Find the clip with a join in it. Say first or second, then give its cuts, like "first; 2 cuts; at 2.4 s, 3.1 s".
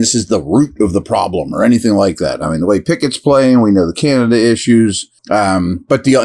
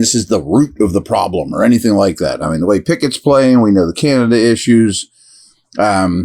first; 1 cut; at 5.2 s